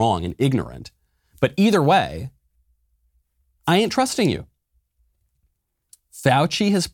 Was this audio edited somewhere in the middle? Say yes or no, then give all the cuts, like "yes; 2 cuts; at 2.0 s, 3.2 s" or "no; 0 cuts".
no; 0 cuts